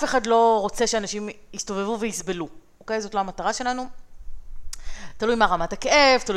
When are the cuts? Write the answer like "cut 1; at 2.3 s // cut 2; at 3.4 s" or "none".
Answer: none